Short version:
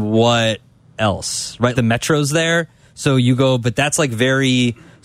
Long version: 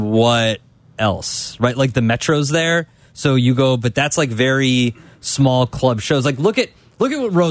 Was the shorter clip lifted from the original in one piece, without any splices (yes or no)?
no